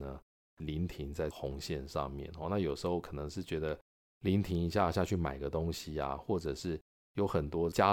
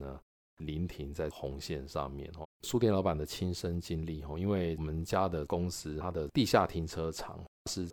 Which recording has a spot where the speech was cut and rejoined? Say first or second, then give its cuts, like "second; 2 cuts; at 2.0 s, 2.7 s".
second; 1 cut; at 2.4 s